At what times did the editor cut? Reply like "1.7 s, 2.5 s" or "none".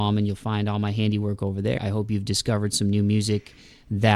1.8 s